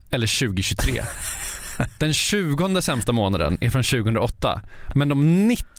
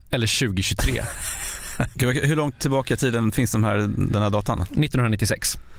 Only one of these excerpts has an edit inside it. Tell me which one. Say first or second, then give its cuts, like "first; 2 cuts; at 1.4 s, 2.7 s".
second; 1 cut; at 1.9 s